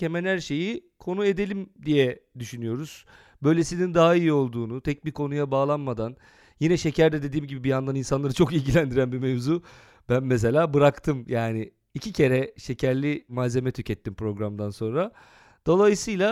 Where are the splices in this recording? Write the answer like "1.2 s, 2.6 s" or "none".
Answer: none